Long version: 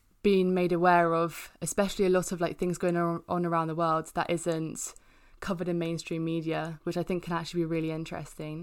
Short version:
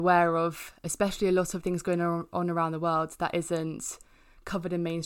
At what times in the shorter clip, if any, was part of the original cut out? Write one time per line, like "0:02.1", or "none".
0:01.6